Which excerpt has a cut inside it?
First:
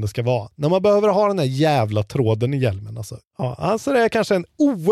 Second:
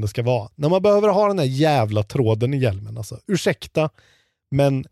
first; 1 cut; at 3.2 s

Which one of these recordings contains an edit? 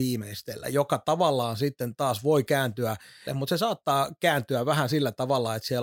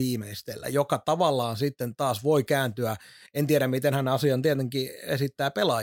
first; 1 cut; at 3.3 s

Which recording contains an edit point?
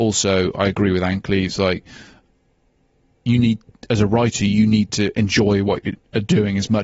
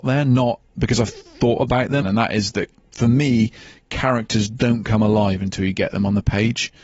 second; 1 cut; at 2.0 s

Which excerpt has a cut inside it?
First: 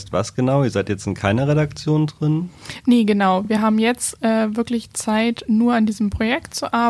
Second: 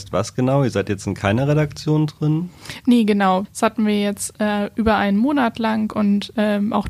second; 1 cut; at 3.4 s

